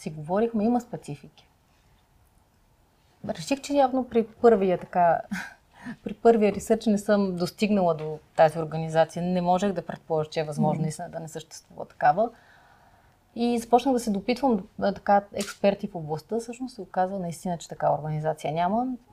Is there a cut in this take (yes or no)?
no